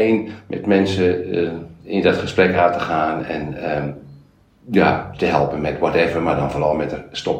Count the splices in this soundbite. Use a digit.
0